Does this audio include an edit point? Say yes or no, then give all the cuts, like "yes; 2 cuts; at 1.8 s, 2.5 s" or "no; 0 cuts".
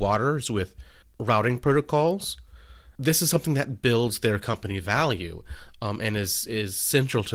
yes; 2 cuts; at 1.0 s, 2.9 s